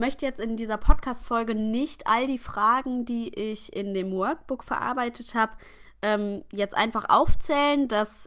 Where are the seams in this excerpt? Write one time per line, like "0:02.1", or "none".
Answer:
none